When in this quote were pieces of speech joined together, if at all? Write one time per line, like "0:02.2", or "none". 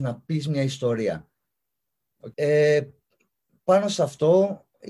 0:02.3

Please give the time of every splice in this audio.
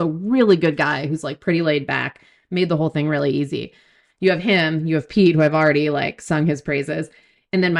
none

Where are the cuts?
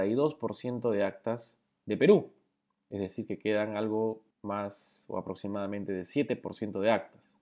0:04.3

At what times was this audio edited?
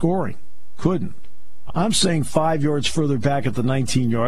0:01.7

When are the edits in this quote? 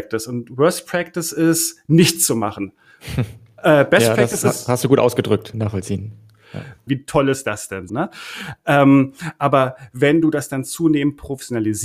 0:05.5
0:06.9
0:07.9

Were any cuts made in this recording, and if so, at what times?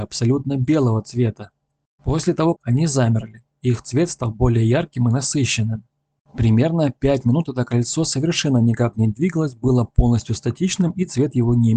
0:02.5

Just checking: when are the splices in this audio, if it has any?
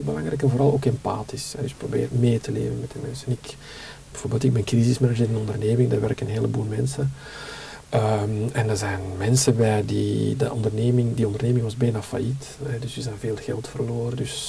none

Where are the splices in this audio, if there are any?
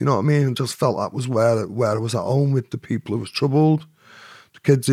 none

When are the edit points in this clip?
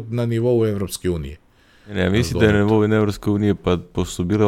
none

